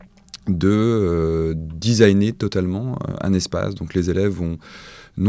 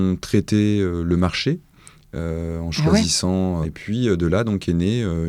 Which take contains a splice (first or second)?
second